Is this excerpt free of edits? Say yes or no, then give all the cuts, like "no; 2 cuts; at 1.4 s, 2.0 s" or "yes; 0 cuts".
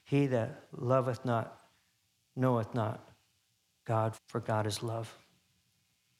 no; 1 cut; at 4.1 s